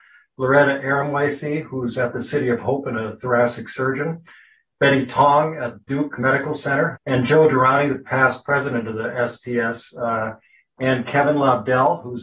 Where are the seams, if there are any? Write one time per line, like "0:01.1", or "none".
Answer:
0:06.9